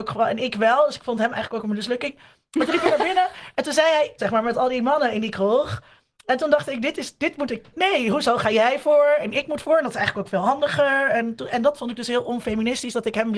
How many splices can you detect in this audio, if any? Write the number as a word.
one